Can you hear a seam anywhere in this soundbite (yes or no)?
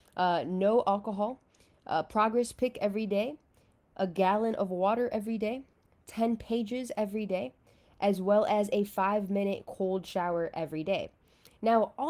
no